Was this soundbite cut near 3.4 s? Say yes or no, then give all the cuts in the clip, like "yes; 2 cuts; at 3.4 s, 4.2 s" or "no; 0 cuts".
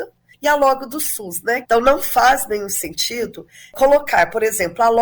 no; 1 cut; at 1.6 s